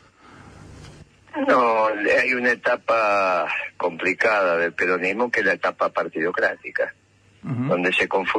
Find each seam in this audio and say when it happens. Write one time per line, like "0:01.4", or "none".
none